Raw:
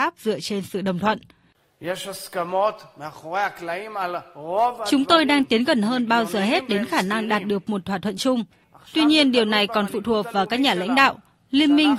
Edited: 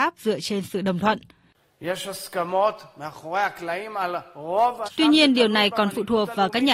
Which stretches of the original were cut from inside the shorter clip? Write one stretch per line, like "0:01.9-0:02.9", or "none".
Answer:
0:04.8-0:08.8